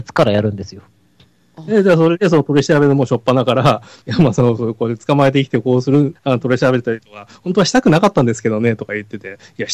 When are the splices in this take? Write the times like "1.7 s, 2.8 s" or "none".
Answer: none